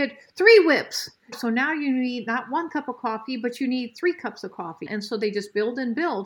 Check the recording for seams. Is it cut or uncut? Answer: cut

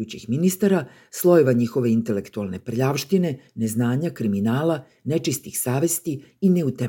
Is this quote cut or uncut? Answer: uncut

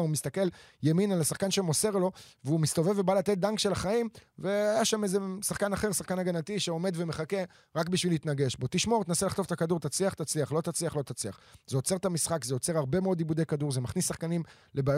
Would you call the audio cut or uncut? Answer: uncut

